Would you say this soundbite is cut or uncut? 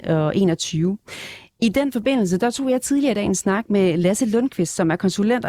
uncut